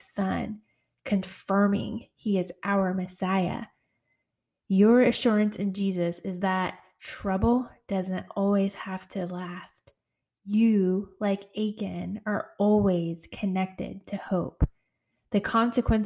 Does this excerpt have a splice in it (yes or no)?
no